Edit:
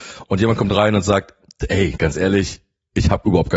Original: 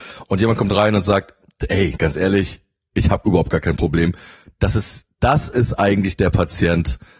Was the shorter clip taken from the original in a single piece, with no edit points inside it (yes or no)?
yes